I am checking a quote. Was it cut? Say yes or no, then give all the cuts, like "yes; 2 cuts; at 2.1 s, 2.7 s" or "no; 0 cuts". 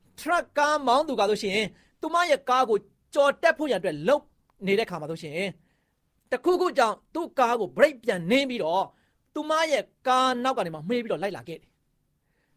no; 0 cuts